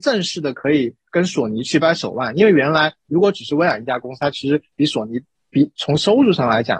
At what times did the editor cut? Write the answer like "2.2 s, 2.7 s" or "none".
1.8 s